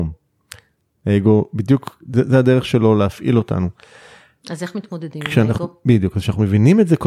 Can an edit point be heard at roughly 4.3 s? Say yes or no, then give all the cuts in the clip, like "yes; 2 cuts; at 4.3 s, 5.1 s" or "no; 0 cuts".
no; 0 cuts